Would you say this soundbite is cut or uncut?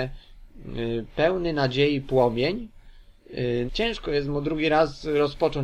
cut